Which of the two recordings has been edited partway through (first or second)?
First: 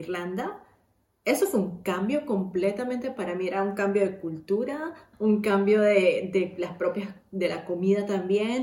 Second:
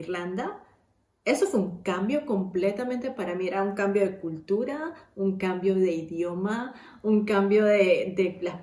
first